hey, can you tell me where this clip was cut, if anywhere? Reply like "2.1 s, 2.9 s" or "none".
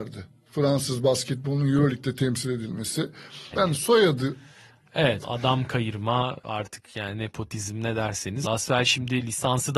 3.5 s, 5.2 s, 8.4 s